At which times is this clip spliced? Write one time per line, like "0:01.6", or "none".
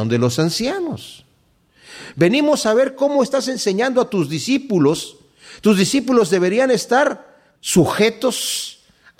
0:02.1
0:07.6